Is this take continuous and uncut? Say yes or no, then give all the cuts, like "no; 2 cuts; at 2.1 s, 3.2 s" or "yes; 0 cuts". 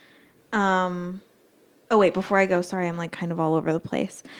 no; 1 cut; at 1.8 s